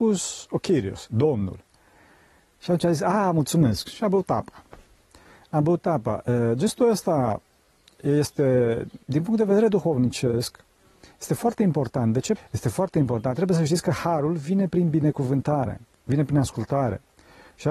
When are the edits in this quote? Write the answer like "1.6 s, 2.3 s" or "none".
9.0 s, 12.4 s, 15.9 s